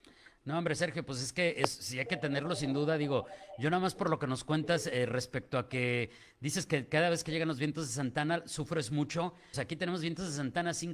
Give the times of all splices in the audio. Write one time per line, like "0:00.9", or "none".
0:09.5